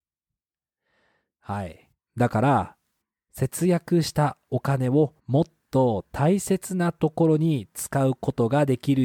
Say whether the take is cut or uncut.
cut